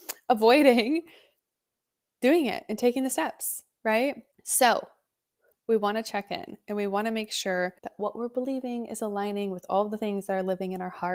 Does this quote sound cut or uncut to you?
cut